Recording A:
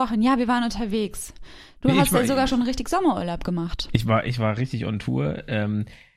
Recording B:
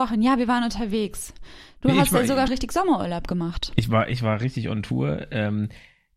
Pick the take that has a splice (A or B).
B